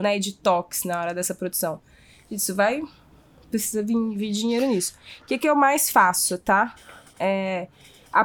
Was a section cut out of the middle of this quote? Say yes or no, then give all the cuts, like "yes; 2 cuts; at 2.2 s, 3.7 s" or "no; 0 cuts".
no; 0 cuts